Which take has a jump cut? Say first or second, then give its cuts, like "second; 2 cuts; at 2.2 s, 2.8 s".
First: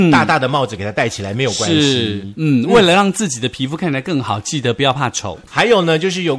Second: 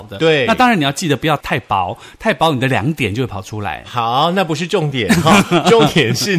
first; 1 cut; at 5.5 s